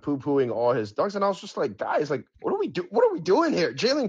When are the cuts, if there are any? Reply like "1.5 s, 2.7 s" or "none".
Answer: 2.3 s